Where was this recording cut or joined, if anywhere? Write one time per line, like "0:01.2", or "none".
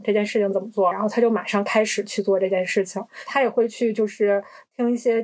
0:00.9
0:03.2